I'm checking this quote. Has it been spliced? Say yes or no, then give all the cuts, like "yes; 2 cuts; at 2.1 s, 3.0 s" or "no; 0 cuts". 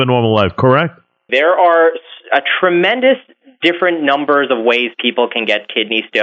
yes; 1 cut; at 1.3 s